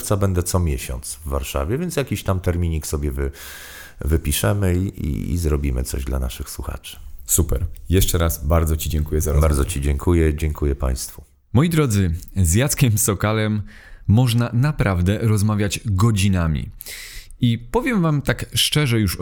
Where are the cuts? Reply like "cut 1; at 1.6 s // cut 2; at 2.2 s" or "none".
none